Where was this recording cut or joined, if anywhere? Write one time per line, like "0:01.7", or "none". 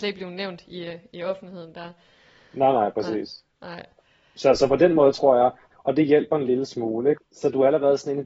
0:07.2